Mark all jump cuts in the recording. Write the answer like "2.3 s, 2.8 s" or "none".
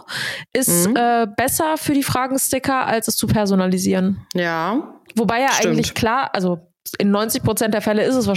none